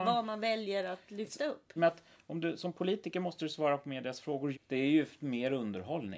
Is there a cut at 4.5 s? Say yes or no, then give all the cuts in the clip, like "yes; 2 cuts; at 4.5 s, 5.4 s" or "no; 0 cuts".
yes; 2 cuts; at 1.8 s, 4.5 s